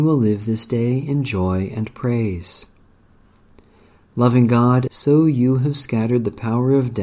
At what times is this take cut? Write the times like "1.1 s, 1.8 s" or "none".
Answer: 4.9 s